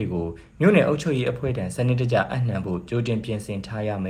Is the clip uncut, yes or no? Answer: yes